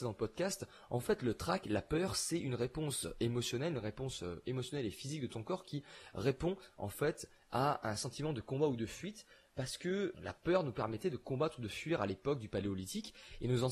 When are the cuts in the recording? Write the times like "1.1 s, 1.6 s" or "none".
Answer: 10.1 s